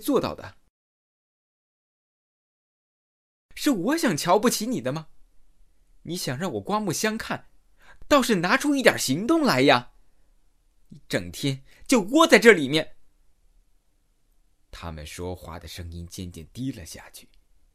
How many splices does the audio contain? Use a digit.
0